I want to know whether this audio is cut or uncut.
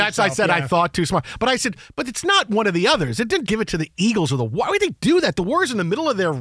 cut